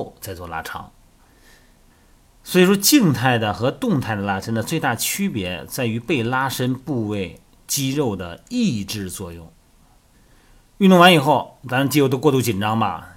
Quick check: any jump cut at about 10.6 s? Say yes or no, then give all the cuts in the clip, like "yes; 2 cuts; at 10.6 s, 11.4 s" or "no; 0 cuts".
no; 1 cut; at 1.2 s